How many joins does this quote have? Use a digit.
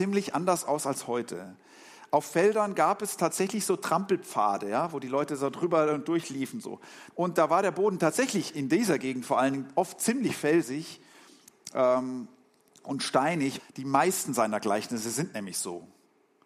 2